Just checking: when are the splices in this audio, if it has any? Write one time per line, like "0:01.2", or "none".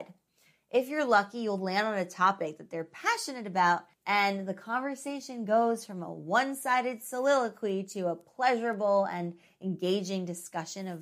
0:03.9